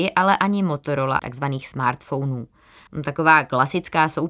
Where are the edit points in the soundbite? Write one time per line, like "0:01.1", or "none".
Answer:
0:01.2
0:02.9